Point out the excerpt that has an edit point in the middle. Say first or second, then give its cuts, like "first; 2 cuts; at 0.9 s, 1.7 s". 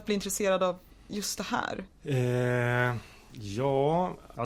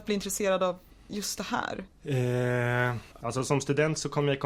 second; 1 cut; at 3.1 s